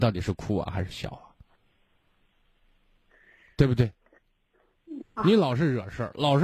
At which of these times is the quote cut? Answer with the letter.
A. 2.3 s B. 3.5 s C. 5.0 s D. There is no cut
C